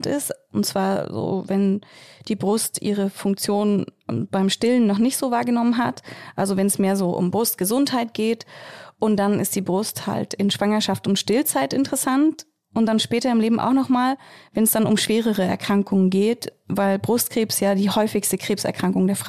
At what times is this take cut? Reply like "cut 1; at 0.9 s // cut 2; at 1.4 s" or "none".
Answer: none

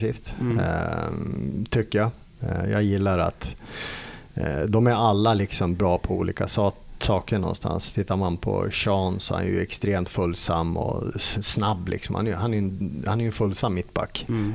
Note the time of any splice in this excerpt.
none

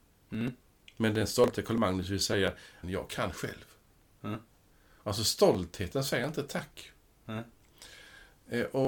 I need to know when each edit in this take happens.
cut 1; at 2.8 s

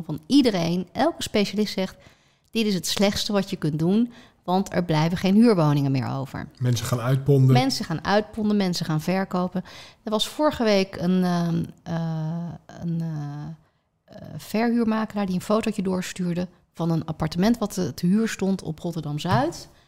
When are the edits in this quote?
none

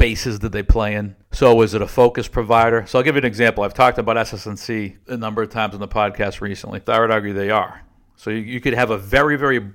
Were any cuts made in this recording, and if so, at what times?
cut 1; at 6.8 s

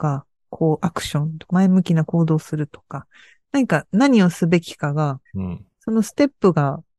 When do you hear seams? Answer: cut 1; at 1.5 s // cut 2; at 5.3 s

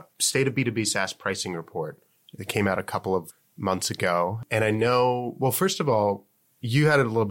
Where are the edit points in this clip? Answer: none

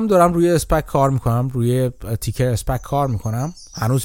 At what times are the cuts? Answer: none

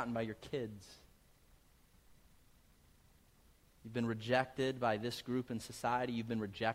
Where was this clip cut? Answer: none

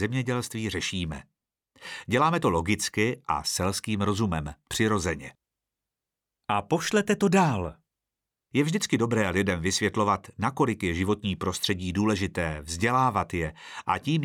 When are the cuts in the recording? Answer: none

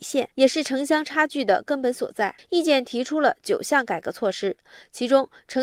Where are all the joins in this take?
cut 1; at 2.4 s

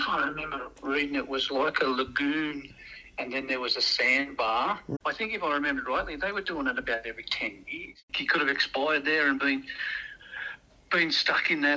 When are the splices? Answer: cut 1; at 5.0 s

